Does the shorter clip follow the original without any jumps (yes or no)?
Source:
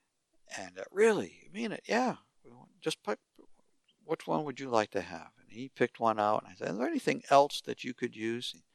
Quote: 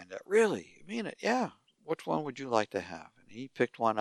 no